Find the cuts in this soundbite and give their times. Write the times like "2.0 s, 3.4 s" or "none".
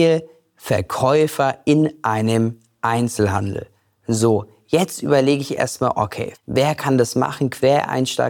6.3 s